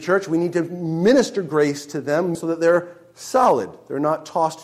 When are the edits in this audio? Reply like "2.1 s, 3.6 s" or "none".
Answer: 2.3 s